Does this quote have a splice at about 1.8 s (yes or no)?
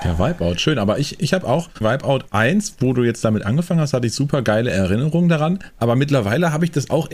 yes